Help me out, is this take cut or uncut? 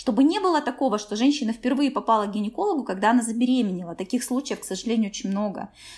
uncut